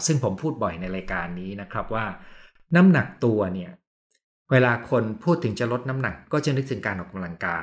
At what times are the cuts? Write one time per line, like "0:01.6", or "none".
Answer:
none